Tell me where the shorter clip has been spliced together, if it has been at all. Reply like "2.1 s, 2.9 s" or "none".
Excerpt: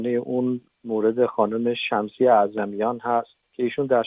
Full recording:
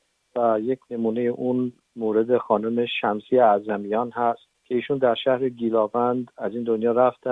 none